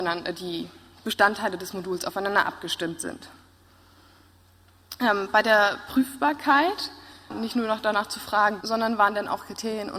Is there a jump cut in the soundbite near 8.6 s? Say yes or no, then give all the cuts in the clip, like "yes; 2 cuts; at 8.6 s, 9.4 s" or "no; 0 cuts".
yes; 2 cuts; at 7.3 s, 8.6 s